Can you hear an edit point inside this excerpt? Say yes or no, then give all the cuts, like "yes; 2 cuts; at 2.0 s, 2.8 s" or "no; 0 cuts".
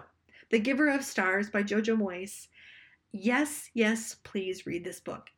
no; 0 cuts